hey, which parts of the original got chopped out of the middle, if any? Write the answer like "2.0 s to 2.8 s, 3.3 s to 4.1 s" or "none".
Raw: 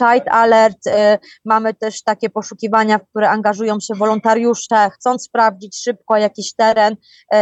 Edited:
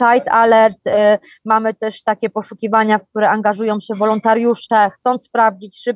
none